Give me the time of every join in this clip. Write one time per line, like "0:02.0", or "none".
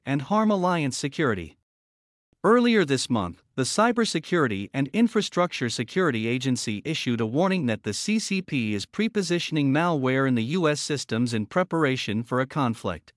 none

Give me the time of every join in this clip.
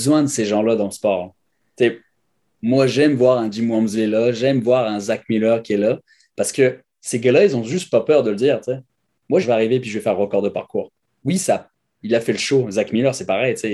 0:09.4
0:12.0

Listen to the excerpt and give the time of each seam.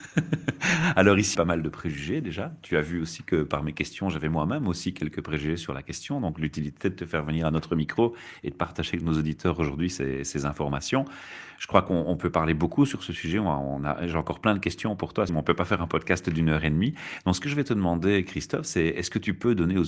0:01.3
0:15.3

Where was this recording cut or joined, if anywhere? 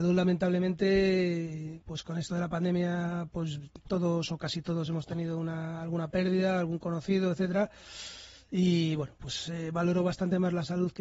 none

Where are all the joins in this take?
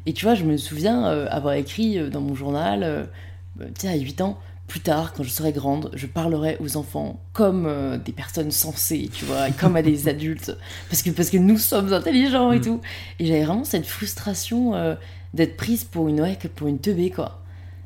none

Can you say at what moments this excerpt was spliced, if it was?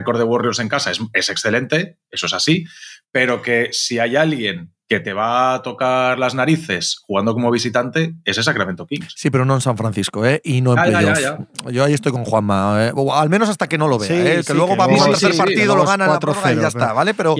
none

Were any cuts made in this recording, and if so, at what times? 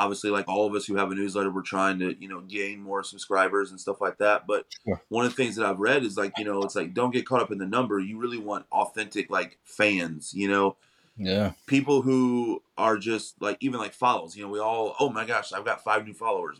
none

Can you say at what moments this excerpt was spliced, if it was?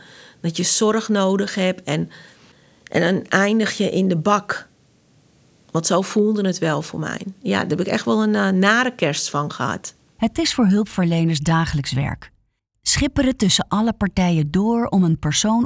none

